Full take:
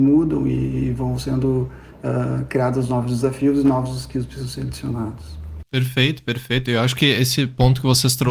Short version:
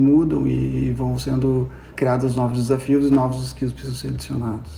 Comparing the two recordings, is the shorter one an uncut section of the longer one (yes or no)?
no